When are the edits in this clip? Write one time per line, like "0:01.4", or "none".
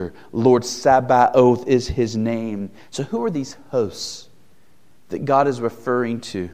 0:02.8